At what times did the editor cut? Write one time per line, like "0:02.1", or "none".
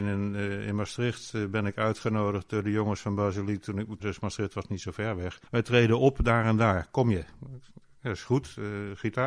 0:04.0
0:05.5